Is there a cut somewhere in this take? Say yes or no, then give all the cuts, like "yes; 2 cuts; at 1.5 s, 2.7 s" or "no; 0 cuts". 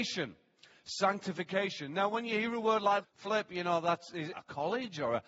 yes; 2 cuts; at 3.0 s, 4.3 s